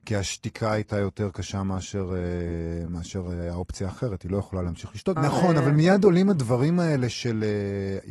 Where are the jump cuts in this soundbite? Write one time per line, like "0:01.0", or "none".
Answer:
0:05.2